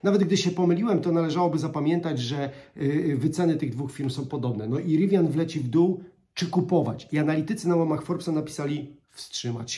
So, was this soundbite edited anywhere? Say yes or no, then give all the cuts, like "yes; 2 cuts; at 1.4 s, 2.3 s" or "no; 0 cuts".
no; 0 cuts